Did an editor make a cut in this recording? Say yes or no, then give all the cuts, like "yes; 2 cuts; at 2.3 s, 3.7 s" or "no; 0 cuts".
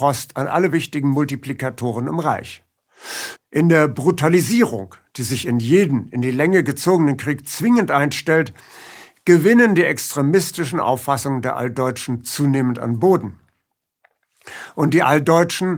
yes; 1 cut; at 3.4 s